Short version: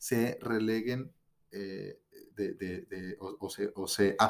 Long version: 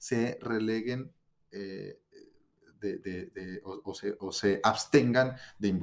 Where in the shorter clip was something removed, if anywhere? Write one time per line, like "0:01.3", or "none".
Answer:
0:02.3